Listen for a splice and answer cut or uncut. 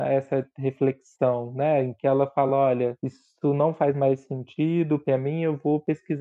uncut